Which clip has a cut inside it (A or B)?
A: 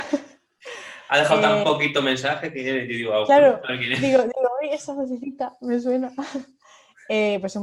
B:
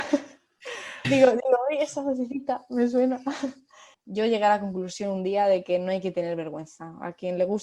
B